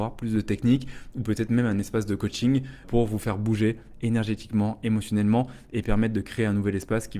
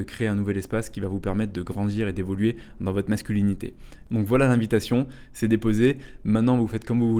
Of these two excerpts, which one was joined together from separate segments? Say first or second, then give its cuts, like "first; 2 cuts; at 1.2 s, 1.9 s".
first; 1 cut; at 2.8 s